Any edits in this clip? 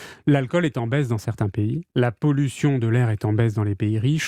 yes; 1 cut; at 1.9 s

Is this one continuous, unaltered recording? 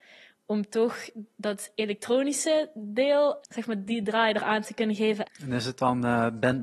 no; 2 cuts; at 3.4 s, 5.2 s

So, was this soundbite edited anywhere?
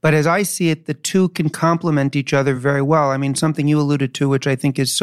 no; 0 cuts

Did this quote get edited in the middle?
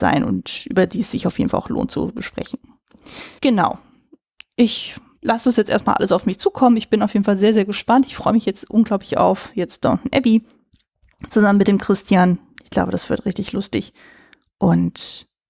no; 0 cuts

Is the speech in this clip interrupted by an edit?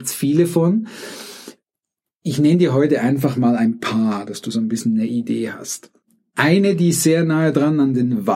no; 0 cuts

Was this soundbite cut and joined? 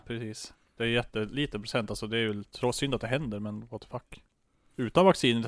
no; 0 cuts

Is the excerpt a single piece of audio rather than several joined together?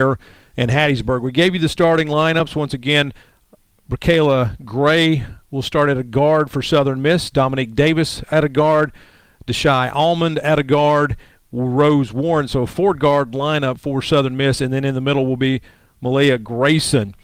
yes; 0 cuts

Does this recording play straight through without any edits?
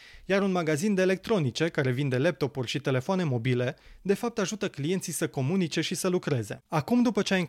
yes; 0 cuts

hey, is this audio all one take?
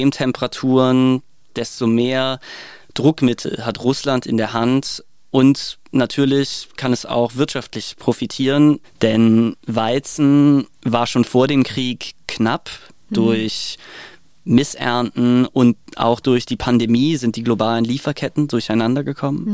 no; 1 cut; at 8.8 s

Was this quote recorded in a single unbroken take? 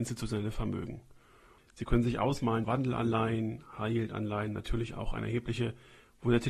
no; 2 cuts; at 1.6 s, 2.6 s

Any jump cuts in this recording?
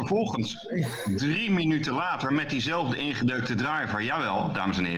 no; 0 cuts

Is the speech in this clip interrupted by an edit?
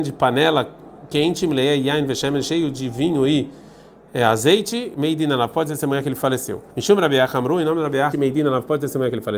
yes; 2 cuts; at 6.7 s, 8.1 s

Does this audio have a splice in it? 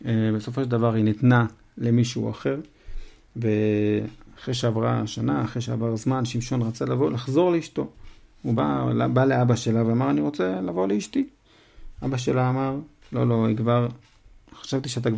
no; 0 cuts

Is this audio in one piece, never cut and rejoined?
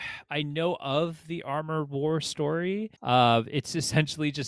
no; 1 cut; at 3.0 s

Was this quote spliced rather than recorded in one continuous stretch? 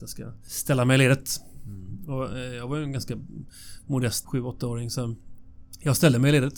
yes; 1 cut; at 4.2 s

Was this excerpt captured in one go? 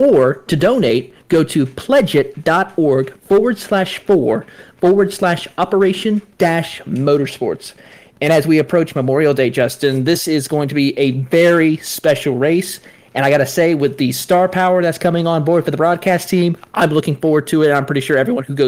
yes; 0 cuts

